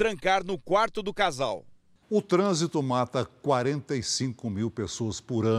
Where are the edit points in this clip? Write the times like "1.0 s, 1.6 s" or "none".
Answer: 2.0 s